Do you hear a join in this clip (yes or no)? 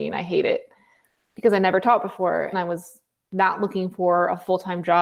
yes